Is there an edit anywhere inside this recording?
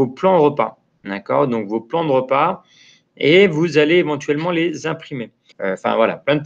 yes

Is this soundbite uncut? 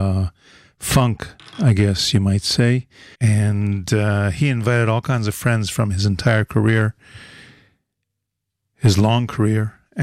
no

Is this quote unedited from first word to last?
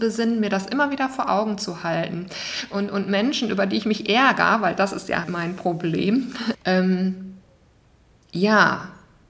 no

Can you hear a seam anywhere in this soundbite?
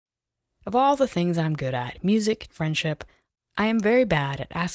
yes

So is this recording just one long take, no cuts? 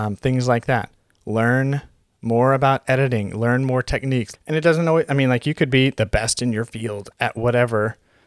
no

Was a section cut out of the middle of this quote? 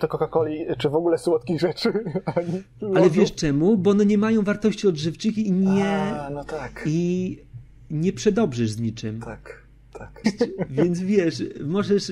yes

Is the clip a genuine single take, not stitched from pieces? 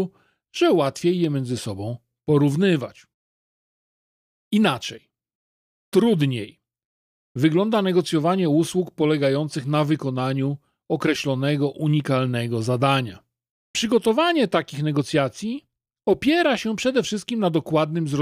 no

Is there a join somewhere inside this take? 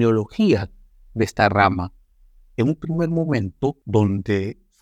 no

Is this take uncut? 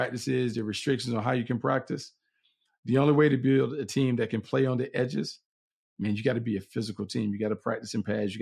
yes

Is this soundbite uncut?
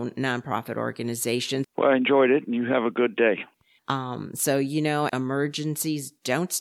no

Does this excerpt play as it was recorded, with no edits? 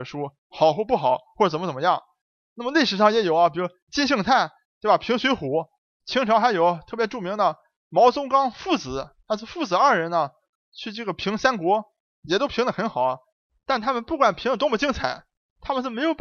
yes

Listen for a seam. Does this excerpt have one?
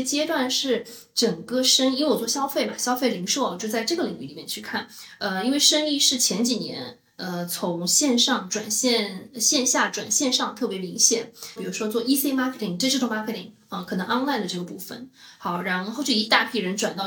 yes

